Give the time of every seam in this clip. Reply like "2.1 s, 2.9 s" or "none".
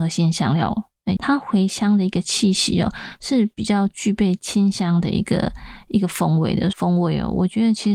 1.2 s, 6.7 s